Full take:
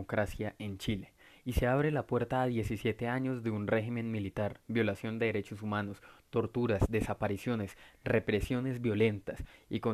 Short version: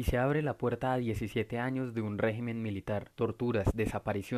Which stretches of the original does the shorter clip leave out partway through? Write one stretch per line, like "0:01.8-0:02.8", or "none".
0:04.6-0:06.3